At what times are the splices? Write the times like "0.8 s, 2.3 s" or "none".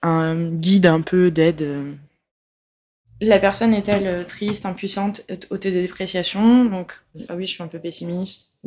7.3 s